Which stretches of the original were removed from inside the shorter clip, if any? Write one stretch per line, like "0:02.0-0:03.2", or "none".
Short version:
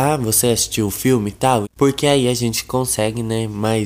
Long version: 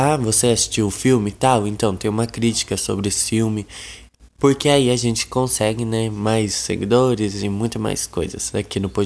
0:01.6-0:04.3